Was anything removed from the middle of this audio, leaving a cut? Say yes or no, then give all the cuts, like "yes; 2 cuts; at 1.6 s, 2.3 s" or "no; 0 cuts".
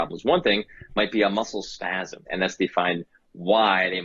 yes; 1 cut; at 2.3 s